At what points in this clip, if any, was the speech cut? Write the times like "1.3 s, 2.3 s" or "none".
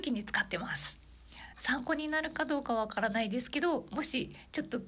none